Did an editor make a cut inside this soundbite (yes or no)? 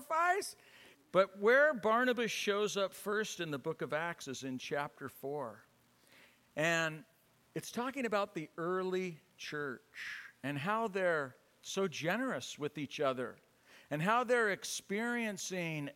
yes